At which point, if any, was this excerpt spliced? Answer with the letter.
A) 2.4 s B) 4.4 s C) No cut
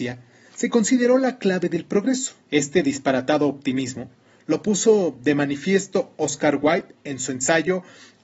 A